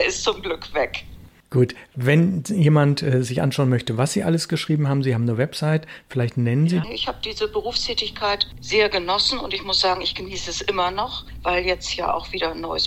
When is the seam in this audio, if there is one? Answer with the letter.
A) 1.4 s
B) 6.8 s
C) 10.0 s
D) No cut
B